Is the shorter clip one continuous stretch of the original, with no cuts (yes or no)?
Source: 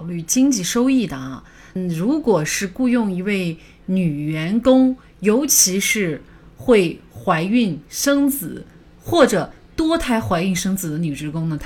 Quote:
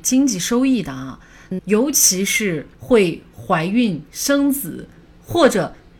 no